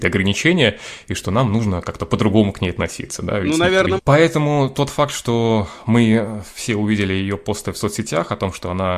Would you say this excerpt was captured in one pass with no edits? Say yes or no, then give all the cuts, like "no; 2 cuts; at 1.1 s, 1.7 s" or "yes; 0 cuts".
no; 1 cut; at 4.0 s